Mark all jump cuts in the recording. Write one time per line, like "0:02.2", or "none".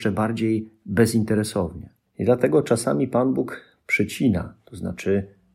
0:02.1